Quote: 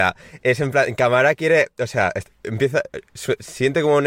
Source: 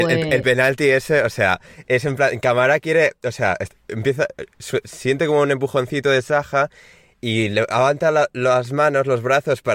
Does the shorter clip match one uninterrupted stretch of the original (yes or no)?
yes